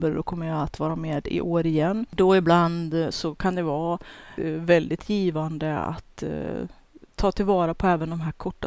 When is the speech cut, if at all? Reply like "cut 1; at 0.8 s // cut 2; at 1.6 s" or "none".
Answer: cut 1; at 2.1 s // cut 2; at 4.4 s